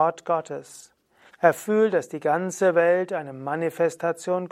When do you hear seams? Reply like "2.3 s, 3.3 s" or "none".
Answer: 1.3 s

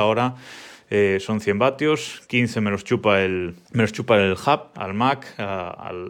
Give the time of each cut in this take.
3.6 s, 4.7 s

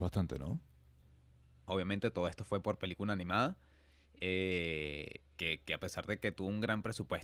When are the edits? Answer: 1.7 s, 5.3 s

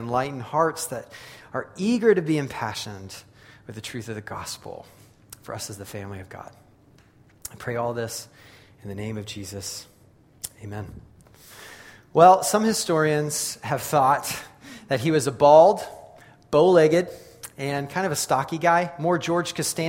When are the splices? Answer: none

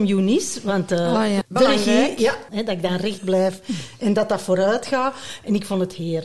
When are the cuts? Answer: 1.4 s, 2.5 s

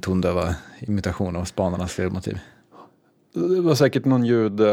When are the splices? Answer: none

